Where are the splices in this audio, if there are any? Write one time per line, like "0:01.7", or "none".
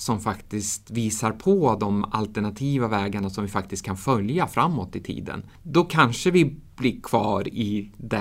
0:05.5